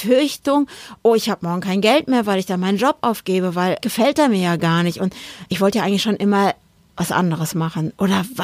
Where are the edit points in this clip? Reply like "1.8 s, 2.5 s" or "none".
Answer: 3.8 s